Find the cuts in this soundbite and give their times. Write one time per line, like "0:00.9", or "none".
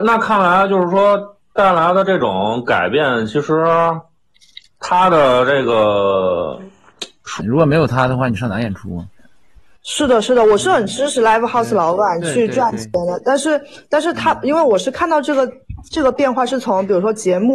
0:07.4
0:09.2